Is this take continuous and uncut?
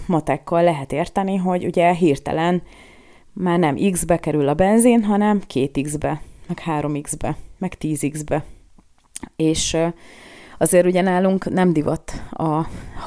yes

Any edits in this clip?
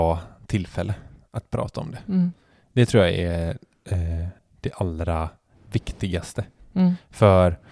no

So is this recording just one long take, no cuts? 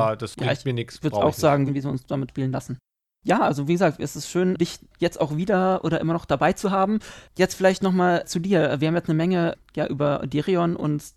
no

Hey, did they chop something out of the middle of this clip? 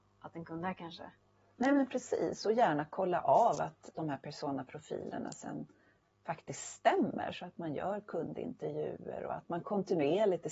no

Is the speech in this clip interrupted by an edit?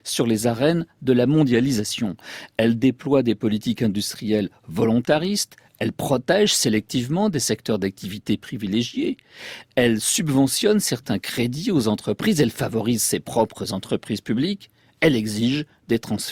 no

